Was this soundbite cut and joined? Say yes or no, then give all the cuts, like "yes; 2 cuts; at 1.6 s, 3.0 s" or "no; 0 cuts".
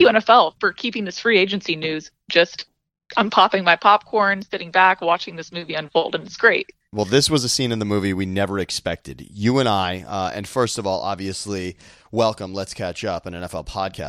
no; 0 cuts